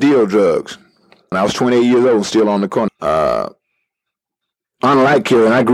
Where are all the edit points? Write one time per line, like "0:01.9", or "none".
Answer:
0:01.3
0:02.9